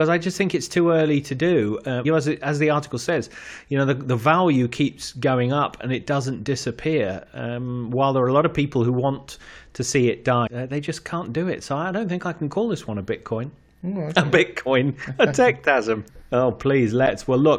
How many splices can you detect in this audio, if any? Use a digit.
3